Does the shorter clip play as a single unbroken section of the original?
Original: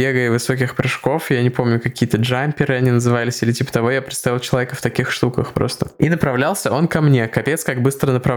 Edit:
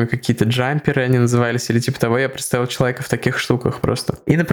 yes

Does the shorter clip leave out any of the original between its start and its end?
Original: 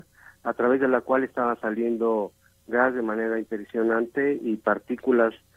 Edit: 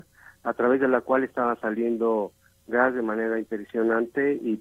no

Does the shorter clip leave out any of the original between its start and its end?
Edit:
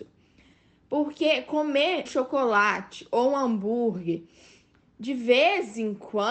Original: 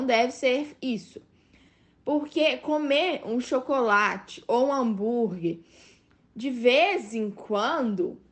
yes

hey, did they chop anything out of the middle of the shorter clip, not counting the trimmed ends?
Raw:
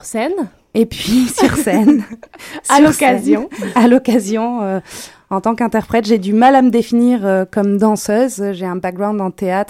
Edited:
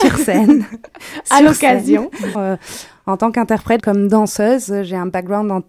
yes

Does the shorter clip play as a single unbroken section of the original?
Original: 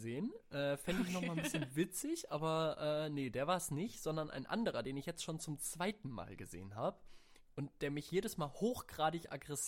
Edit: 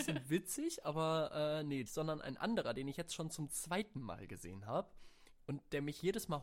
no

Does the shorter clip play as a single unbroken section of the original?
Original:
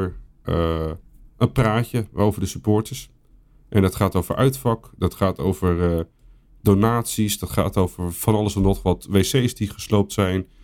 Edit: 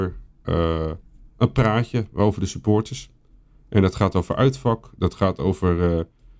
yes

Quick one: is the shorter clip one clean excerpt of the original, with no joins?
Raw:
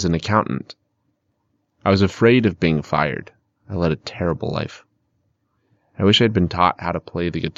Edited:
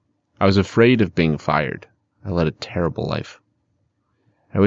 yes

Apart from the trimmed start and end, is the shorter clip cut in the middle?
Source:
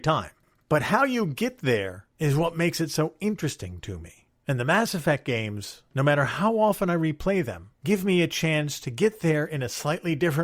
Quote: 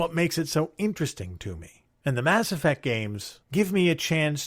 yes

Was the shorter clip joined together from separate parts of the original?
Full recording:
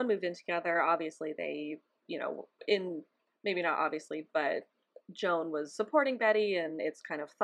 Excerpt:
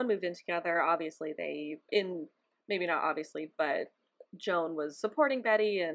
yes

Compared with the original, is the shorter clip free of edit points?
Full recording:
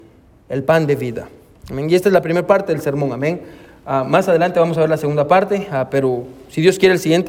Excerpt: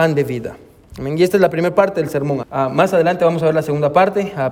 no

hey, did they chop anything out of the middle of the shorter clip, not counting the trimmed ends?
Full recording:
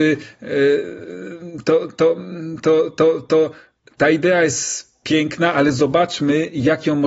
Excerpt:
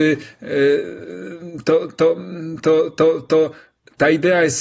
no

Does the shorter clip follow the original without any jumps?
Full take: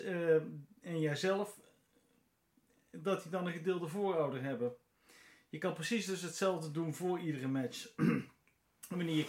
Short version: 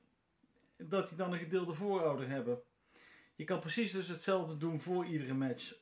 yes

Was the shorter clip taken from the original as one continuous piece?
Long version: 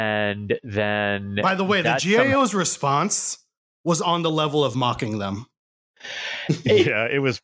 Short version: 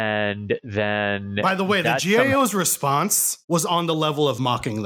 no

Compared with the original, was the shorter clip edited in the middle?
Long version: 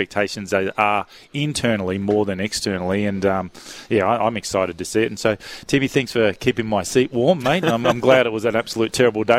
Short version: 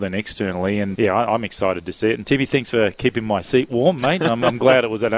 yes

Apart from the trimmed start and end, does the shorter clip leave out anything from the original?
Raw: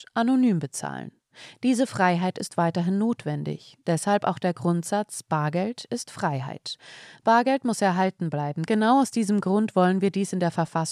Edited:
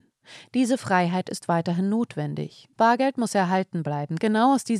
yes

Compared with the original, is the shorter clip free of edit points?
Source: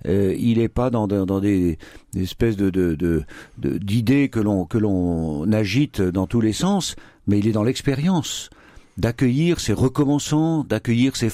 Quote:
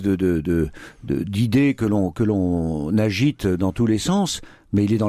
yes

